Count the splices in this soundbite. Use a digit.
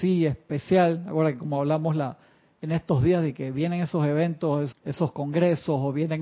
1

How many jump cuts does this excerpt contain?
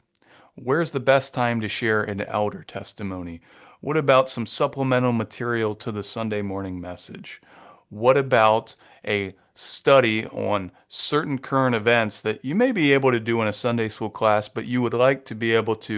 0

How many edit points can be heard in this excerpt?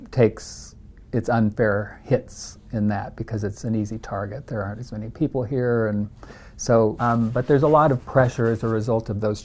1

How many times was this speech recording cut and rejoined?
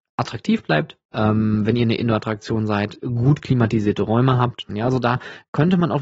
2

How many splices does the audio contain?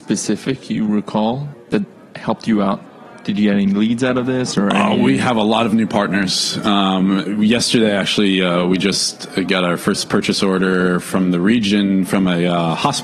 1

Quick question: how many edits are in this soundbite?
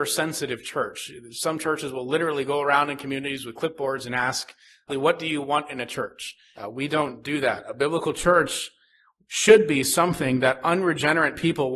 2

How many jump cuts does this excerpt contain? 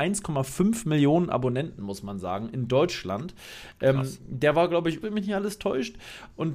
1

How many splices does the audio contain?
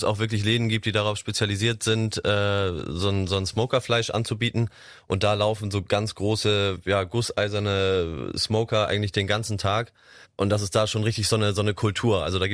0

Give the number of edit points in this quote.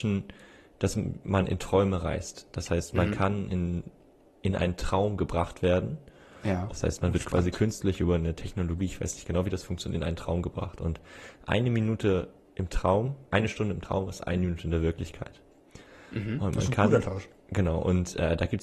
2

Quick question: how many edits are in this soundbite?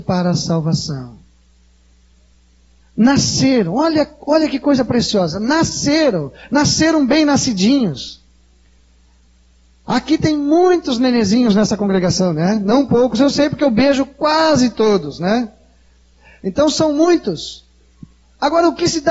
0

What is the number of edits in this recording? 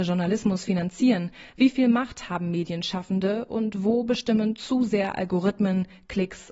0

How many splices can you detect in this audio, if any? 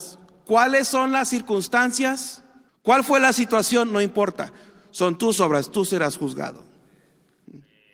1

